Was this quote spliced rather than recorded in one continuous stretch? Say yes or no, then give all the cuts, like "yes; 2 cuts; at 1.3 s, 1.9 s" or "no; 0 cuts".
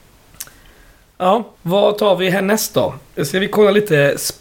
yes; 1 cut; at 1.5 s